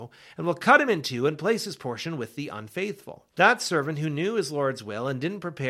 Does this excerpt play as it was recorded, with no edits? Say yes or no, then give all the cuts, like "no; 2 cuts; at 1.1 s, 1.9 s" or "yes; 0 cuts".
no; 1 cut; at 3.3 s